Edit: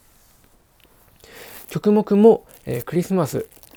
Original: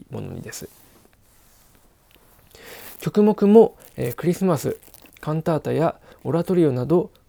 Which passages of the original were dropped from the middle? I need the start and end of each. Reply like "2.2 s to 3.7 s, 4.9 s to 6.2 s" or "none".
none